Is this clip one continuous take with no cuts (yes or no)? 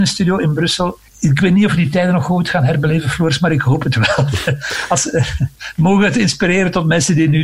no